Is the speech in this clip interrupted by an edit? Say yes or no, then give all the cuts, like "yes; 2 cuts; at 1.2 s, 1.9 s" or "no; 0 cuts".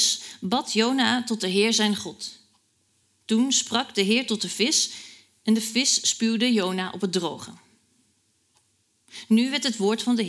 no; 0 cuts